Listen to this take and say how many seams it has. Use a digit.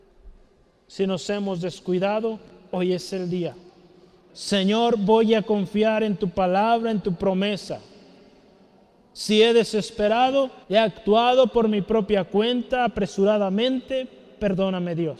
2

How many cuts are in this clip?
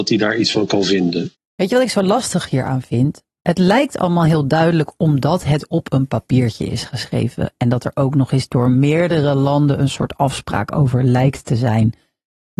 0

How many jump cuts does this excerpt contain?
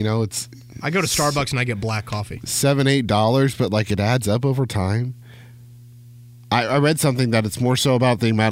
0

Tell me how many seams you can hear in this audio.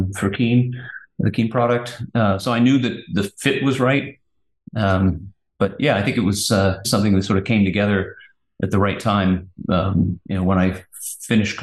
1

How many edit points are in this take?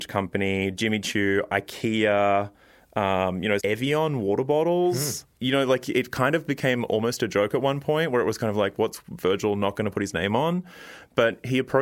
1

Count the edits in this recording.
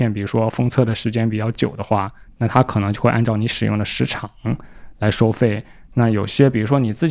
0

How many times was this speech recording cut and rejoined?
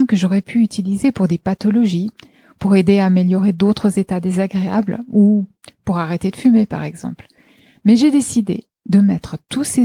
0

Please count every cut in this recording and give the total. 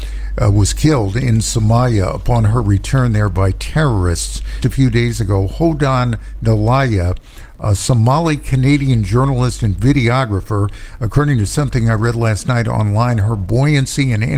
1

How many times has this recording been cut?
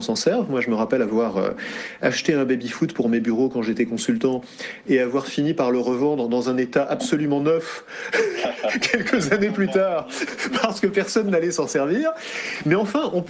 0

